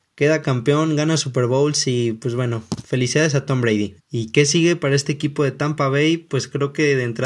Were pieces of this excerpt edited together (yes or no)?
yes